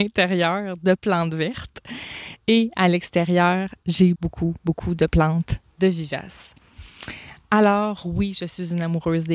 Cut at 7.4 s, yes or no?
no